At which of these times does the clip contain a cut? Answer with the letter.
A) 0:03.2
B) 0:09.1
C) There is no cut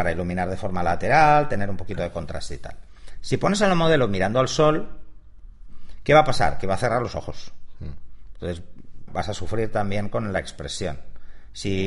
B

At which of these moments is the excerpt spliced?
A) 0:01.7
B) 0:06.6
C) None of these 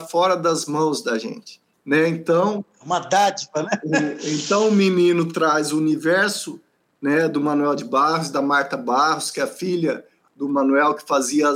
A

